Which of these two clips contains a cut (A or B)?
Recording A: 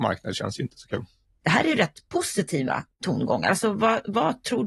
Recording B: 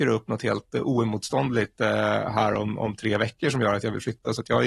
A